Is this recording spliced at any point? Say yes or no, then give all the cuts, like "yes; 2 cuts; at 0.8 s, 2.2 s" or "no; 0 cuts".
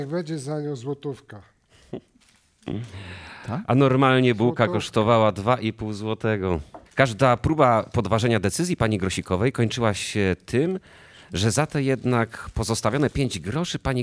yes; 1 cut; at 6.9 s